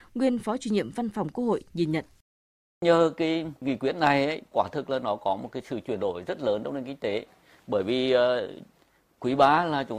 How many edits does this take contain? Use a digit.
0